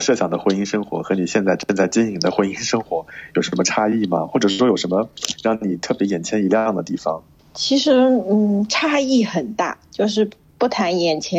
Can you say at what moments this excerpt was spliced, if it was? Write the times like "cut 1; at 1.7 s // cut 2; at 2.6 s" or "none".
none